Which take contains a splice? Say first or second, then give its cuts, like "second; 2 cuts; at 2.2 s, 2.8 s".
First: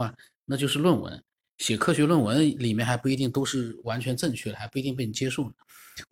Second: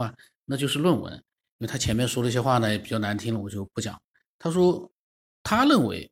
second; 1 cut; at 1.5 s